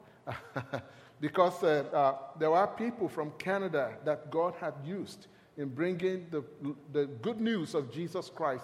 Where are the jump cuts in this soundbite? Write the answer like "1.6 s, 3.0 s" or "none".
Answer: 1.9 s

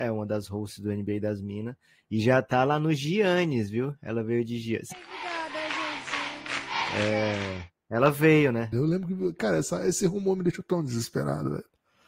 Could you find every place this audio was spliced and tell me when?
4.9 s, 6.9 s, 8.7 s

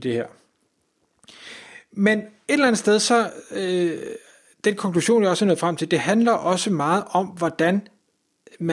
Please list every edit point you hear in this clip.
none

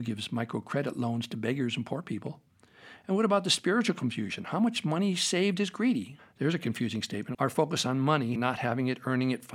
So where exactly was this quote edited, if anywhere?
6.2 s, 7.3 s, 8.4 s

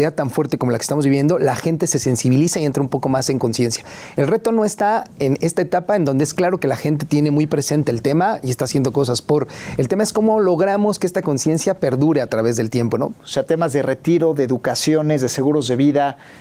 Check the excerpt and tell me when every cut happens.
13.1 s

